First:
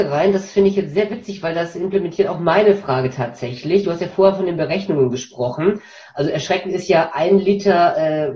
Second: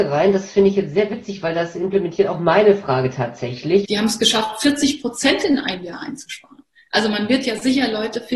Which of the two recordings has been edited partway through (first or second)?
second